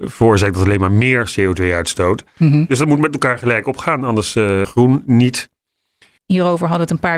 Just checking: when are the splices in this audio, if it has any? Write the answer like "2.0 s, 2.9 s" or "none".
4.6 s, 6.2 s